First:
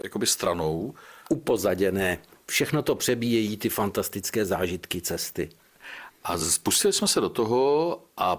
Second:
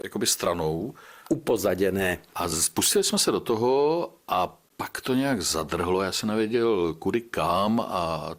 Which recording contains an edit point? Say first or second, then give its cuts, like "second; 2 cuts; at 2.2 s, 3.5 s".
second; 1 cut; at 2.3 s